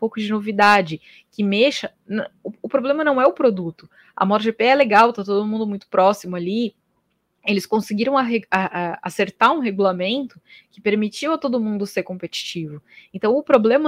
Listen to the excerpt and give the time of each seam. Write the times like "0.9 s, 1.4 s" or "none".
none

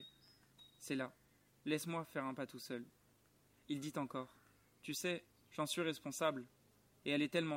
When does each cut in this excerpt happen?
3.6 s, 5.5 s

